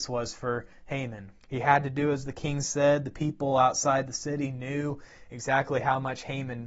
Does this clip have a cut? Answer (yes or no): yes